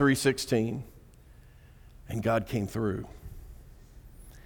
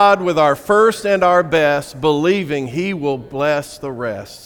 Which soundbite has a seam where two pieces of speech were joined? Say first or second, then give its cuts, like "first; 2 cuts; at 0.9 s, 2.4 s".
first; 1 cut; at 2.1 s